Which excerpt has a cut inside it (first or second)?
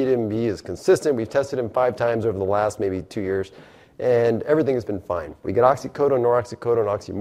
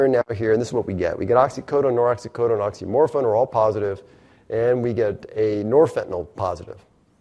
first